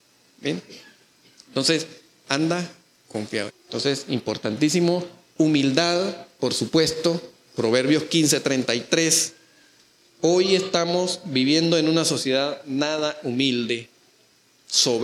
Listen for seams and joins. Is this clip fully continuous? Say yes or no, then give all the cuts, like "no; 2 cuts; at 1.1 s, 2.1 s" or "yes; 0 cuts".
no; 2 cuts; at 2.2 s, 3.5 s